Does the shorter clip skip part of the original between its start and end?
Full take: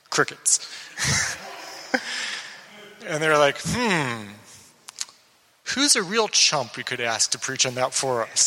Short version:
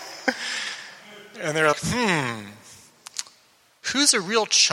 yes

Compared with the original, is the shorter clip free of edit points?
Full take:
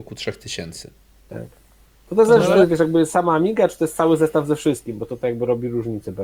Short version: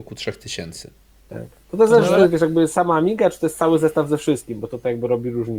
no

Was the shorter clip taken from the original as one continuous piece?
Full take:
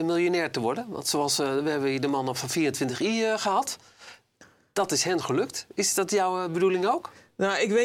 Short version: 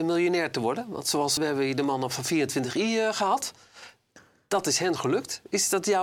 no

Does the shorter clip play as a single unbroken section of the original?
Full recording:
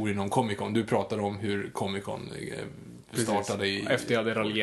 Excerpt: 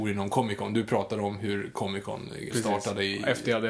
no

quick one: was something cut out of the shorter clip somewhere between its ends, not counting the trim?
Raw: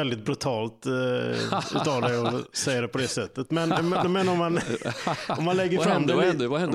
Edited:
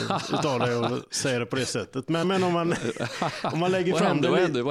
yes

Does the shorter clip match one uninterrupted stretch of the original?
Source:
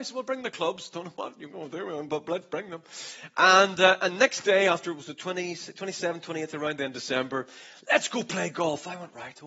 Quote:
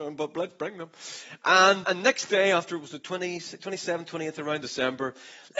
no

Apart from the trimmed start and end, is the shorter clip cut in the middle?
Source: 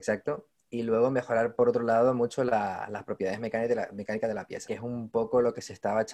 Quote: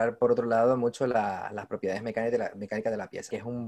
no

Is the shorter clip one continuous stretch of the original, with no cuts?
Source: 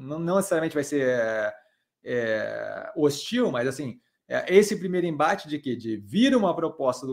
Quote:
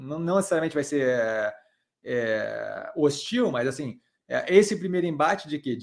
yes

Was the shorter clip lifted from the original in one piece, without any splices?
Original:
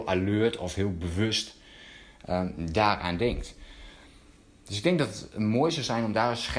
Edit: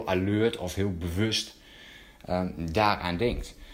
yes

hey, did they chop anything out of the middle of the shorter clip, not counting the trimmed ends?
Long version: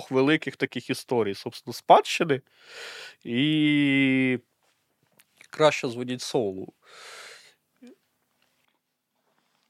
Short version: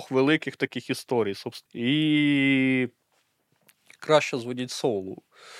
yes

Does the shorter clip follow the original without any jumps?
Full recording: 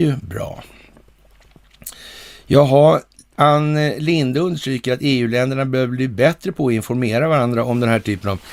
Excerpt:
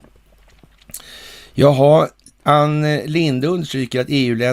yes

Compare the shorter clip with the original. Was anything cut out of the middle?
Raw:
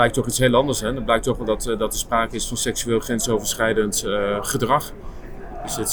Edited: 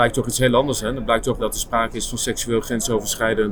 yes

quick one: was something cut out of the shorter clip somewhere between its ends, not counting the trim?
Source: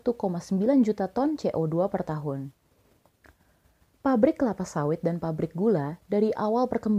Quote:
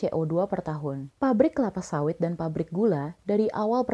yes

